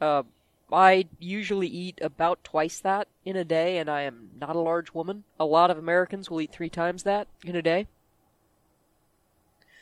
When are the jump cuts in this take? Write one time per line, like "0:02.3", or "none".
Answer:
0:05.3
0:07.3